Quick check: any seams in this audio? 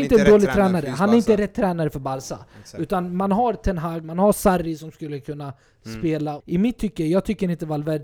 yes; 2 cuts; at 4.0 s, 6.4 s

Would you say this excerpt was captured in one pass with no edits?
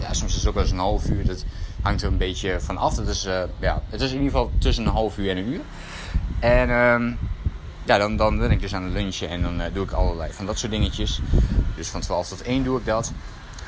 no; 2 cuts; at 10.3 s, 11.8 s

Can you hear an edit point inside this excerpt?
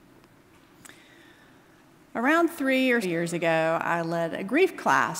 yes; 1 cut; at 3.0 s

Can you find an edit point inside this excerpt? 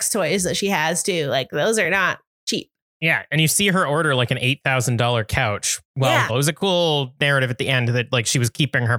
yes; 1 cut; at 6.3 s

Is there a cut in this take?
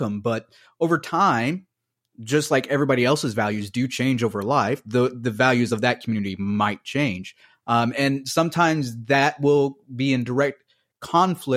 no; 0 cuts

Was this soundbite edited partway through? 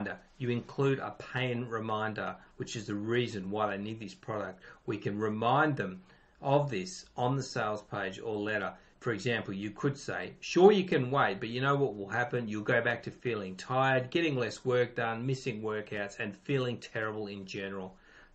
no; 0 cuts

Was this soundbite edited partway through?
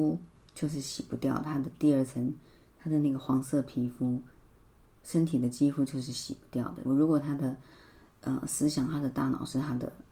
yes; 1 cut; at 6.8 s

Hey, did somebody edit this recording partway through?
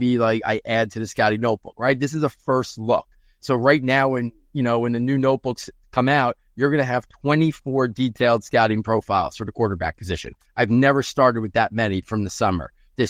no; 0 cuts

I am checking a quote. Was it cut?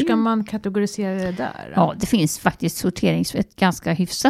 no; 0 cuts

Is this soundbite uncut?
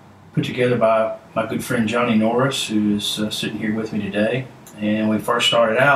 yes; 0 cuts

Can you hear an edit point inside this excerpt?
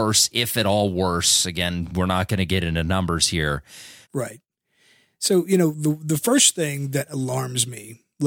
yes; 1 cut; at 4.0 s

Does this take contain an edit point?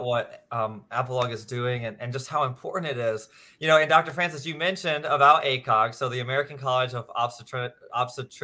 no; 0 cuts

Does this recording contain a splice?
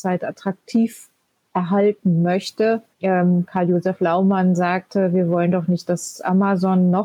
yes; 1 cut; at 2.9 s

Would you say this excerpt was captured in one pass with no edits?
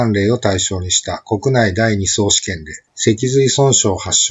no; 1 cut; at 2.9 s

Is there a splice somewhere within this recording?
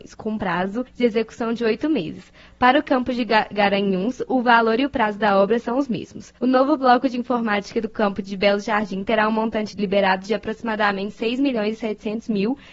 yes; 1 cut; at 6.4 s

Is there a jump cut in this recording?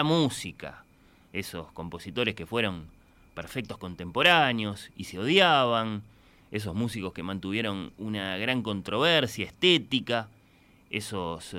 no; 0 cuts

